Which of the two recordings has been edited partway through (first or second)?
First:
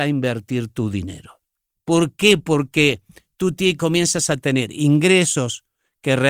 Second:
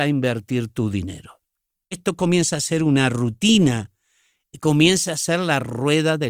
first